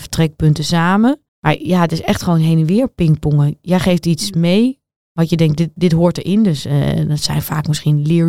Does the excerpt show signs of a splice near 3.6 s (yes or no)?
no